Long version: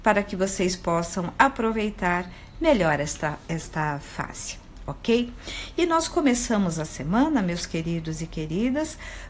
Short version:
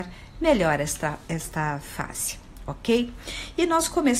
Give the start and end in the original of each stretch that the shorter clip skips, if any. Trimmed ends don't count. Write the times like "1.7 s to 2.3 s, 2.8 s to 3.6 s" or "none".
none